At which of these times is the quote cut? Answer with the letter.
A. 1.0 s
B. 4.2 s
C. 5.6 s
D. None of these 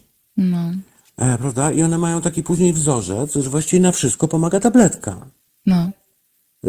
D